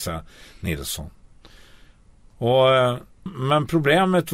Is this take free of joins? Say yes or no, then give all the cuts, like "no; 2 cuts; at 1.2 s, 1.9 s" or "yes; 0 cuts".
no; 1 cut; at 3.3 s